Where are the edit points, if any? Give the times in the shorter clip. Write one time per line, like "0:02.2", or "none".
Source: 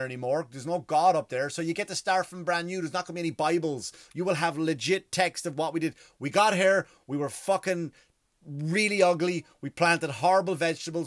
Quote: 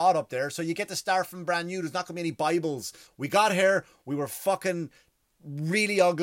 0:03.1